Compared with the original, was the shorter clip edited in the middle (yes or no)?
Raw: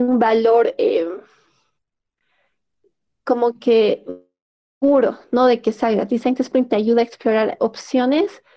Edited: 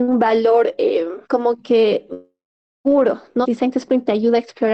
yes